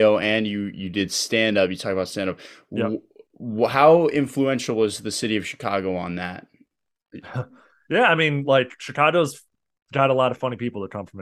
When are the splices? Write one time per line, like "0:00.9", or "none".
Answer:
none